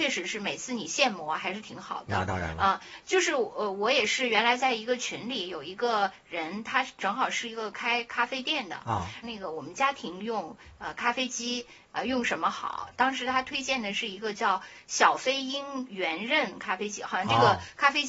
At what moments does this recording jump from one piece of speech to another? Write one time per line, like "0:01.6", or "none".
0:09.2